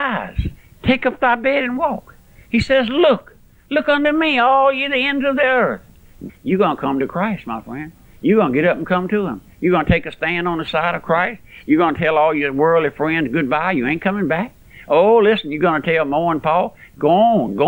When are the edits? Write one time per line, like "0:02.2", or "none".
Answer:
0:06.3